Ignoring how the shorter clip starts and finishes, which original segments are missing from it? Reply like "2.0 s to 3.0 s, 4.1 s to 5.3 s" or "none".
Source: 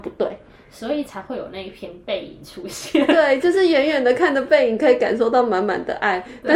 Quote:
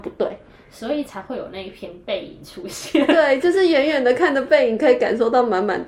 none